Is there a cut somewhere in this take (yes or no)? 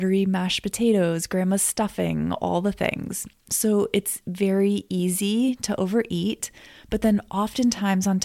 no